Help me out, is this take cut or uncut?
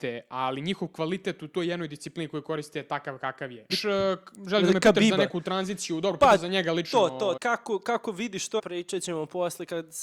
cut